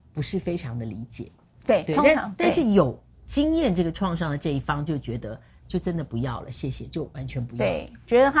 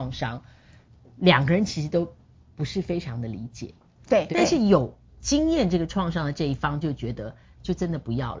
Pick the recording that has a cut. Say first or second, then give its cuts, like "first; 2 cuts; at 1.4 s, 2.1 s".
second; 1 cut; at 4.3 s